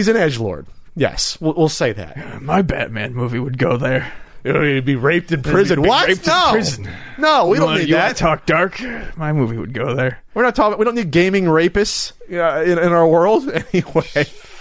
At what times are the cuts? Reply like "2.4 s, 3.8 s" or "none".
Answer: none